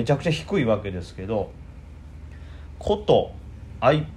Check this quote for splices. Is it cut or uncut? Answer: uncut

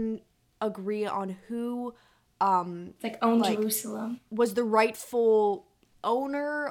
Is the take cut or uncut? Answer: uncut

